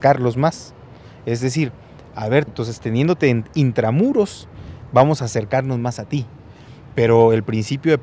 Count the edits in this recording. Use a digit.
1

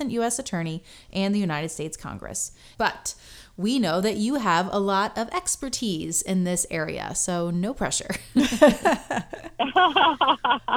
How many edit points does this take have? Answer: 1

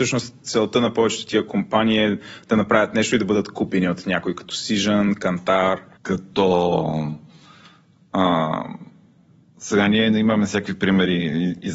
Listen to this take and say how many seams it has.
1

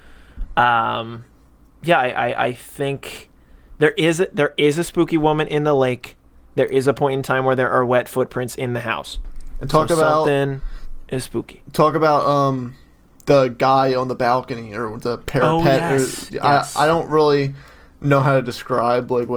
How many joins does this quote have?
0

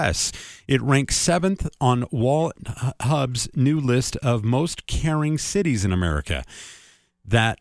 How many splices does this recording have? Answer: 0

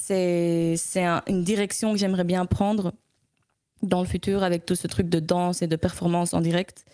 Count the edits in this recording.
0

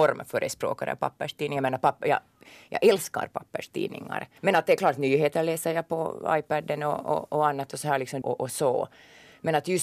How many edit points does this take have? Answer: 2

